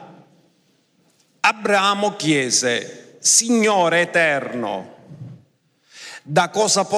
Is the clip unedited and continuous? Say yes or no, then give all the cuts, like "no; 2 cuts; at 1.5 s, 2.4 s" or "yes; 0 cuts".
yes; 0 cuts